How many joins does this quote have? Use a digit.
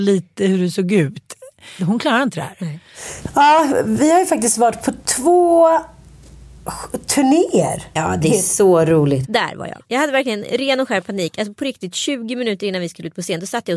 2